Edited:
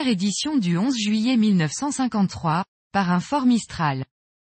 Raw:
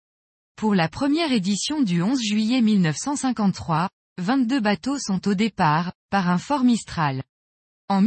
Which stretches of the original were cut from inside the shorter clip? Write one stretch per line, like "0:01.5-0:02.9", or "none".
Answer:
0:04.0-0:06.0

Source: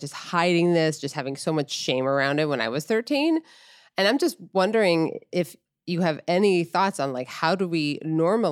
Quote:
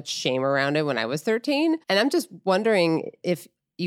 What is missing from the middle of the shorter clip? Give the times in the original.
0:03.5-0:03.9

